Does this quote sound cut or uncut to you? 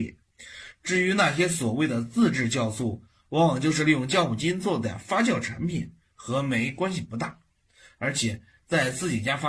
uncut